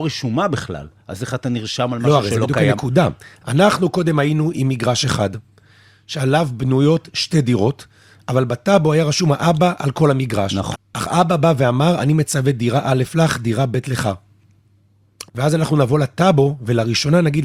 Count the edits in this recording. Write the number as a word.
two